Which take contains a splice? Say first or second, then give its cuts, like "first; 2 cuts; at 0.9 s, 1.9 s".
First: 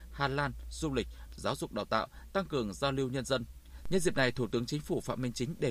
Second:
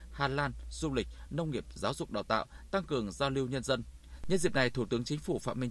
first; 1 cut; at 1.3 s